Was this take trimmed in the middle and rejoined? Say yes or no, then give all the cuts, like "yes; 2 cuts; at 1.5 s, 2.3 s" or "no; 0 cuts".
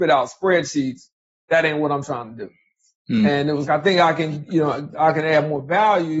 yes; 2 cuts; at 3.7 s, 4.9 s